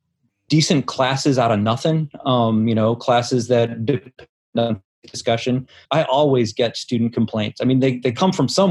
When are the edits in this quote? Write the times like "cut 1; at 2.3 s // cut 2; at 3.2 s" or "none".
cut 1; at 5.8 s